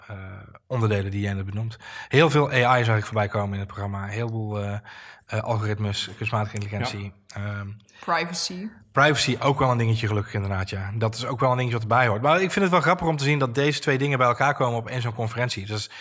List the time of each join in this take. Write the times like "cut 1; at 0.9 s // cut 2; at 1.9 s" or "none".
none